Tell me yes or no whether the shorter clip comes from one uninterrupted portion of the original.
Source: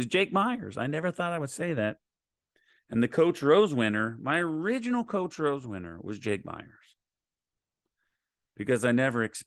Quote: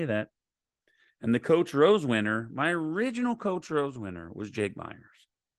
yes